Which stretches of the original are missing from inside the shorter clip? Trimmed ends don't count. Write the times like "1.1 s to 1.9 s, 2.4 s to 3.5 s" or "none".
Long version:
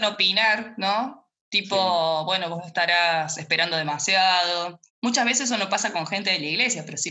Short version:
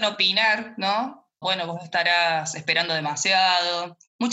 1.4 s to 2.2 s